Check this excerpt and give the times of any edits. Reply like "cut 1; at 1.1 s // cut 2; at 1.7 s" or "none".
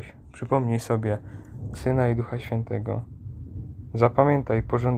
cut 1; at 1.7 s